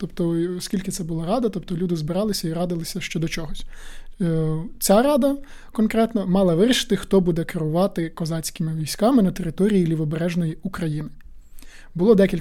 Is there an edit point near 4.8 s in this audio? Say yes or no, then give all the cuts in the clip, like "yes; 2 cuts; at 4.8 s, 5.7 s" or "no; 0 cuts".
no; 0 cuts